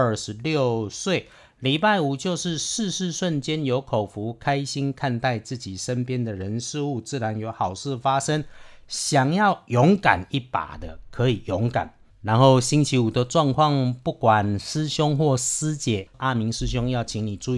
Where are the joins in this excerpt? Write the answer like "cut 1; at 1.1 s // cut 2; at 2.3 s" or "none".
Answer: cut 1; at 12.1 s